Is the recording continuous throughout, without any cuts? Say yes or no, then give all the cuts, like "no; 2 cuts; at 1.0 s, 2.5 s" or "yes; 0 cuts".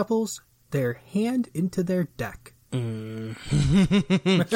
no; 1 cut; at 2.6 s